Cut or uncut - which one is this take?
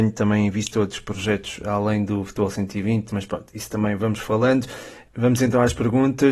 uncut